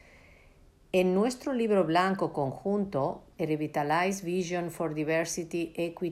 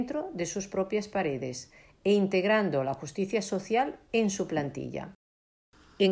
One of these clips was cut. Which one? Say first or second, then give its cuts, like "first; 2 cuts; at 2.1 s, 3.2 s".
first; 1 cut; at 3.3 s